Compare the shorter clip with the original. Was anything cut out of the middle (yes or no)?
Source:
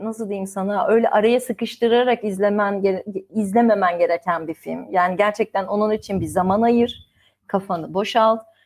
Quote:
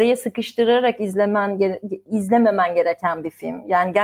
no